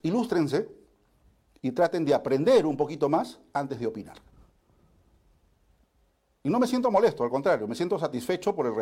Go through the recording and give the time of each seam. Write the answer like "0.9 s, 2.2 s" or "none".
none